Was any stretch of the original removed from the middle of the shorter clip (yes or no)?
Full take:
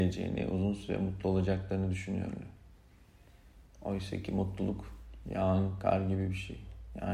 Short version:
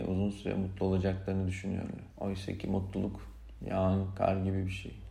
yes